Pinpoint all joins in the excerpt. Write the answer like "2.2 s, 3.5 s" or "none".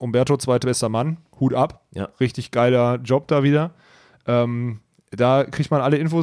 none